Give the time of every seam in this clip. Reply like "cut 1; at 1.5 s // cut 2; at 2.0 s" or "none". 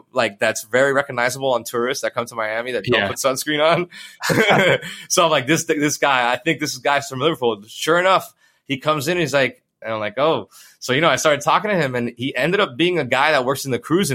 cut 1; at 9.8 s